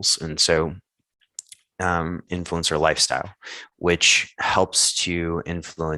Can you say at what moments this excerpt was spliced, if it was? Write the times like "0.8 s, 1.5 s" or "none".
2.3 s

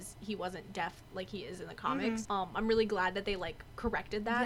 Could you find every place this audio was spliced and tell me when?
2.2 s

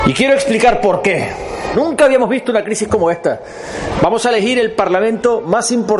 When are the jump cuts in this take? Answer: 1.7 s, 4.0 s

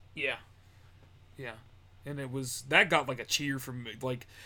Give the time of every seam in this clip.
none

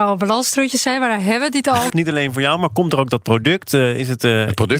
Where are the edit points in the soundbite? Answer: 1.9 s

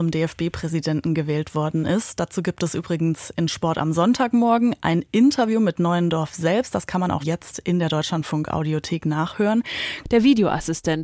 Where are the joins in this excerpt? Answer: 7.2 s, 10.0 s

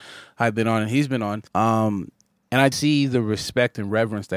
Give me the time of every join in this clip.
1.5 s, 2.7 s

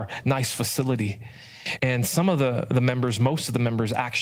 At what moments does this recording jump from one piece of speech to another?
1.8 s

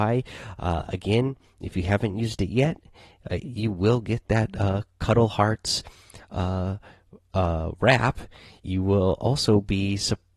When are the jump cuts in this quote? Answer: 3.4 s

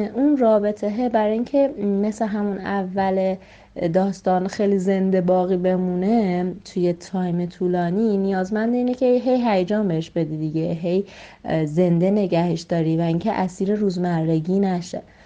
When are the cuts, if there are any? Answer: none

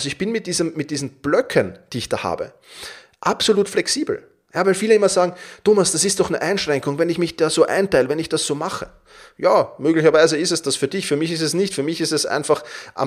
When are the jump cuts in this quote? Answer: none

